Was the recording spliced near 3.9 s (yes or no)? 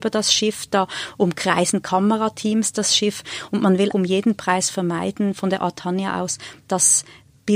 yes